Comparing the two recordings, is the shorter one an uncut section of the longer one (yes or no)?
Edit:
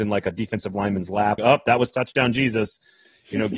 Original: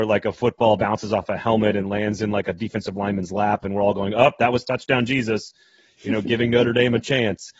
no